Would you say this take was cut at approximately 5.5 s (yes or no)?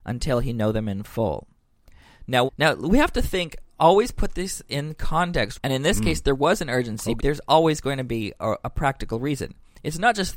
yes